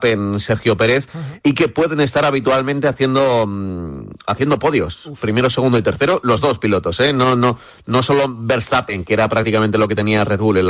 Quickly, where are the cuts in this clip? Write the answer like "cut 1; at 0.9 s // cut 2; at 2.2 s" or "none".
none